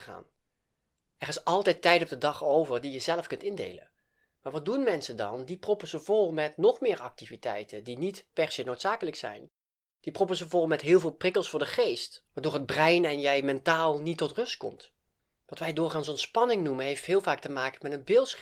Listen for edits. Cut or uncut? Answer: cut